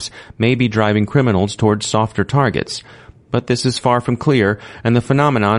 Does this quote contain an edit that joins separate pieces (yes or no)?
no